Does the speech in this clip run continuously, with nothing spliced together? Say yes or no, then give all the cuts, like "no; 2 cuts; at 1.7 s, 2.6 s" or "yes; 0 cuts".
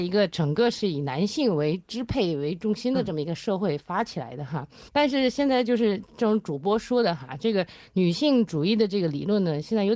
no; 1 cut; at 4.9 s